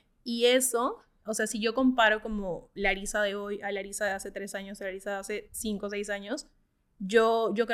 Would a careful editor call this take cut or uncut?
uncut